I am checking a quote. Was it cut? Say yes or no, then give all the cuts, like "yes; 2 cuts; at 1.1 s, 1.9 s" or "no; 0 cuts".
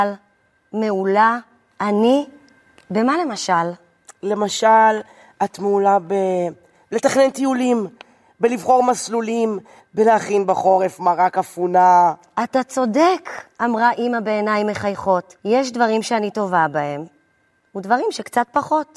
yes; 2 cuts; at 9.8 s, 15.4 s